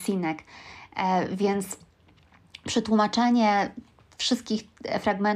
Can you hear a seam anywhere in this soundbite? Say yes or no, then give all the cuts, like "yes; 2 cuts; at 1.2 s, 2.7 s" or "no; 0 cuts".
no; 0 cuts